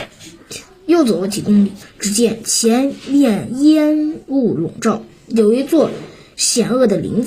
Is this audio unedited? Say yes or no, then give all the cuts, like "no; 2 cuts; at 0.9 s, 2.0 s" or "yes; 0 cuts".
no; 1 cut; at 1.8 s